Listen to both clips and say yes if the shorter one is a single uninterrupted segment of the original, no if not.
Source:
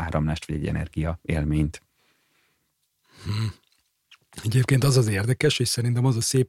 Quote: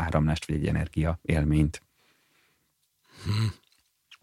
yes